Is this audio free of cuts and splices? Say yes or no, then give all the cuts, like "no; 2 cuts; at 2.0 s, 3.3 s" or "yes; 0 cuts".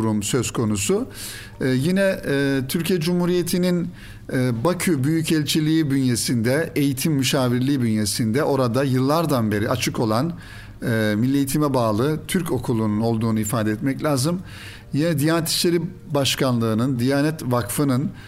yes; 0 cuts